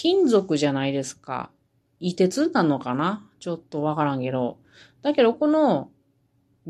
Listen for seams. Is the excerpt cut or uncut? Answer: uncut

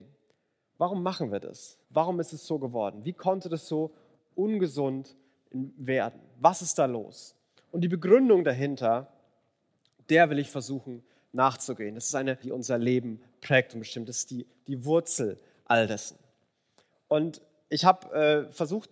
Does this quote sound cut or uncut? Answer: cut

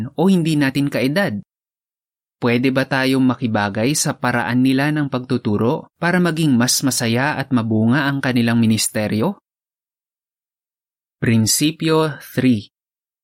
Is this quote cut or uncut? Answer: uncut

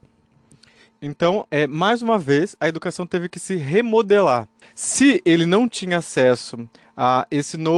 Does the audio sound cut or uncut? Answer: cut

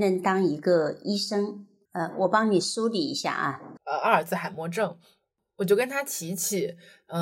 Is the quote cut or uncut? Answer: cut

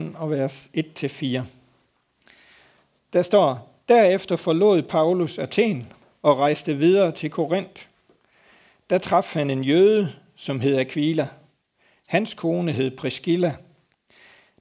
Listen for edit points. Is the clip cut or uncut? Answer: uncut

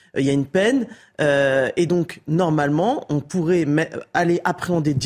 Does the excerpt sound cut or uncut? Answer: uncut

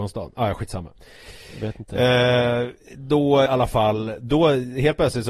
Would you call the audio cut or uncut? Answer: cut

